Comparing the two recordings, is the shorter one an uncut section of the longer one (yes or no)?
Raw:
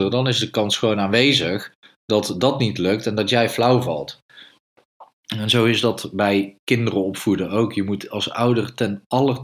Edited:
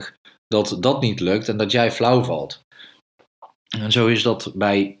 yes